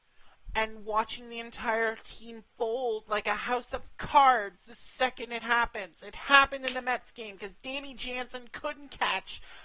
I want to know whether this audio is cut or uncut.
uncut